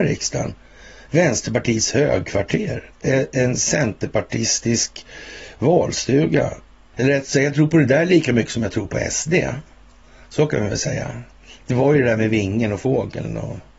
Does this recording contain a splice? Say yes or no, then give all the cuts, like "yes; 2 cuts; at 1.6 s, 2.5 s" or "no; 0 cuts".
yes; 1 cut; at 6.9 s